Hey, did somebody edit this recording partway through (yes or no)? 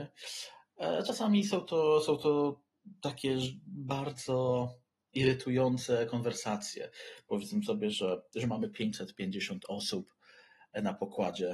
no